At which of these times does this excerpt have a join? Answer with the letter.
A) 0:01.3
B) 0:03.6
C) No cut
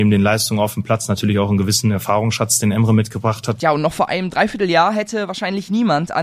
B